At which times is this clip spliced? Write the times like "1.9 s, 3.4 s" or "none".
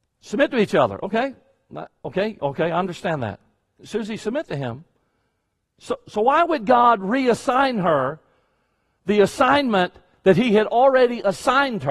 none